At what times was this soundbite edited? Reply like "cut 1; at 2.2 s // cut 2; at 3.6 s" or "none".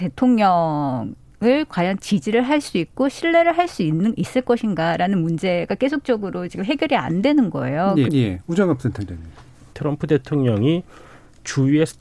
cut 1; at 8.1 s // cut 2; at 9.7 s